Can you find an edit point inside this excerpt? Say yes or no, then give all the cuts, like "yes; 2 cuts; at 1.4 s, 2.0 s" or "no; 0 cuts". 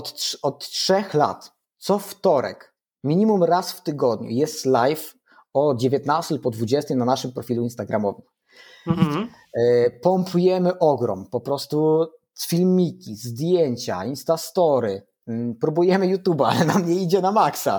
no; 0 cuts